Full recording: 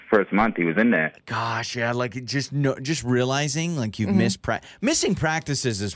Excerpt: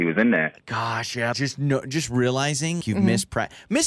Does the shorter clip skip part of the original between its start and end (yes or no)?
yes